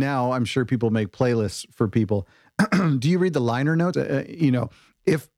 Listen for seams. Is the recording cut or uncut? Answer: cut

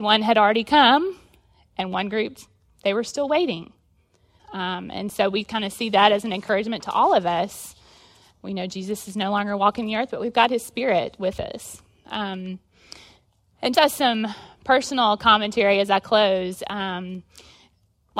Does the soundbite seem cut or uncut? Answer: cut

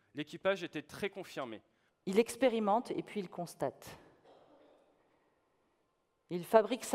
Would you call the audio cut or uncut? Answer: cut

